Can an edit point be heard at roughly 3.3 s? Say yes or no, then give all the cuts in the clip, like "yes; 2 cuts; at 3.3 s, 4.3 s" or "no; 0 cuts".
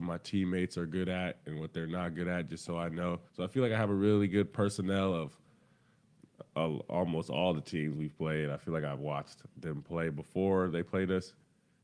yes; 1 cut; at 3.3 s